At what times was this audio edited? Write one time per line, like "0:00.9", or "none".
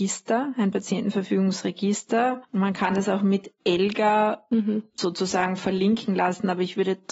none